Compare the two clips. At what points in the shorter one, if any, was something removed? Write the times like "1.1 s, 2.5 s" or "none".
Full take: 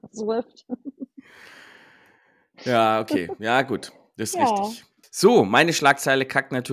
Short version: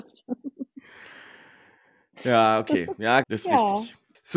3.2 s